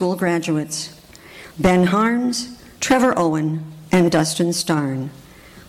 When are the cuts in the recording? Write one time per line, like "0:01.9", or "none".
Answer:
0:01.5
0:02.8

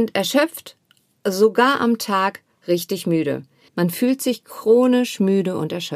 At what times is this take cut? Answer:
0:03.7

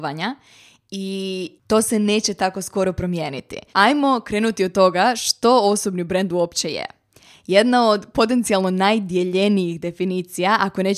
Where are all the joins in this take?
0:03.7

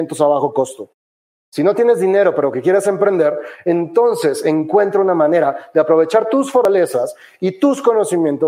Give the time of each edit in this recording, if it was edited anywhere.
none

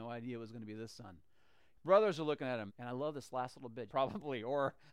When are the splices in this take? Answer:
0:02.7
0:03.9

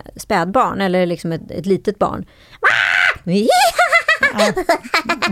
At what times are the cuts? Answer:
none

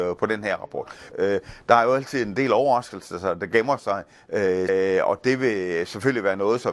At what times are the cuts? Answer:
0:01.1
0:04.7

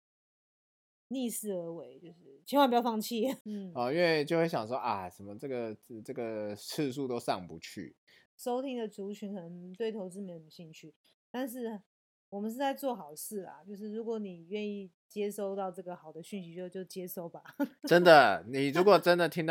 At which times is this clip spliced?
0:03.4
0:08.3

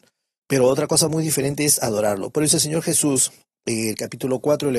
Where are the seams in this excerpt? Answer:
none

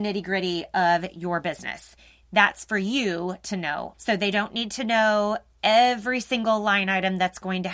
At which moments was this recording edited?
0:03.9

